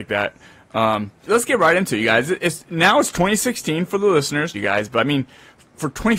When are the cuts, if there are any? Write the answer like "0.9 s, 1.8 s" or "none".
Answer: 1.3 s, 4.5 s